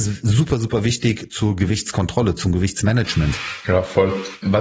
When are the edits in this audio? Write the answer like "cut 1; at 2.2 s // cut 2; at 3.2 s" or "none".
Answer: cut 1; at 3.6 s